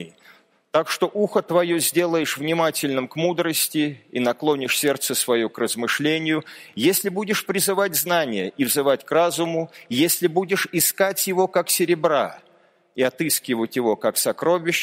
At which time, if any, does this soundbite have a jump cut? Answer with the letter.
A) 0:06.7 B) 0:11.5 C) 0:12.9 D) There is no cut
D